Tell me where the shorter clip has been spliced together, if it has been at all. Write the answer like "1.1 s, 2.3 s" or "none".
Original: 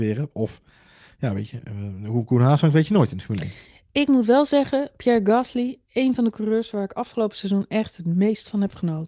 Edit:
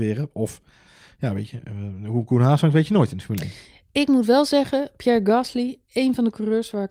none